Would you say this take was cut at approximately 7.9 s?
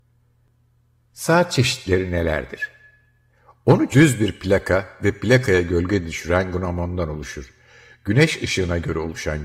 no; 1 cut; at 3.9 s

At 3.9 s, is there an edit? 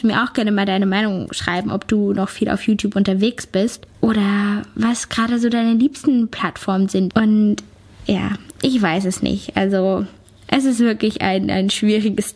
yes; 2 cuts; at 3.9 s, 7.1 s

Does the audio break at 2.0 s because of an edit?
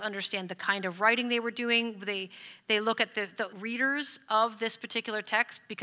no; 1 cut; at 3.5 s

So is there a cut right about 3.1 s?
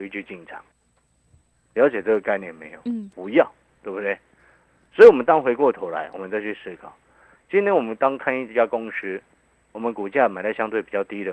yes; 1 cut; at 3.1 s

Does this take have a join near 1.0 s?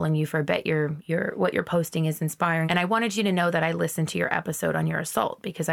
yes; 2 cuts; at 1.0 s, 2.7 s

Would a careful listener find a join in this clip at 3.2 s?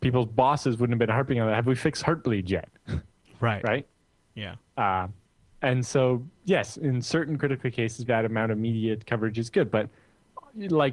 no; 1 cut; at 8.1 s

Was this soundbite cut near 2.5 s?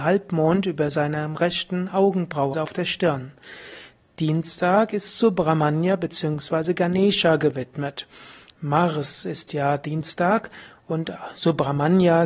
yes; 1 cut; at 2.5 s

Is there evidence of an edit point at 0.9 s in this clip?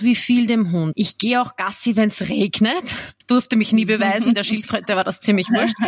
yes; 2 cuts; at 0.9 s, 3.2 s

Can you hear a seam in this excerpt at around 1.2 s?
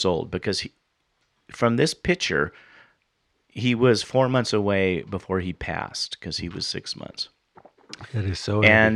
no; 0 cuts

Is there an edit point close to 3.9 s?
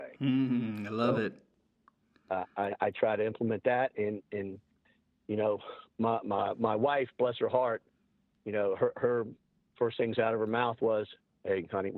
no; 1 cut; at 2.7 s

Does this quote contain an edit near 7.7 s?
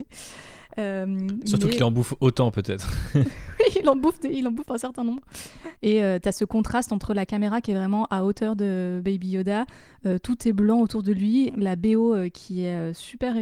no; 2 cuts; at 5.8 s, 11.5 s

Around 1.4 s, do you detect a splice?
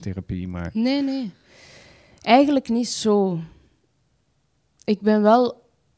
no; 0 cuts

